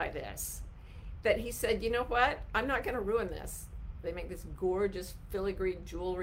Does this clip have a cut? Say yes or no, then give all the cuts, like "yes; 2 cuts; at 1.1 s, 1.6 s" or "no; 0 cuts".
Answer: yes; 1 cut; at 4.0 s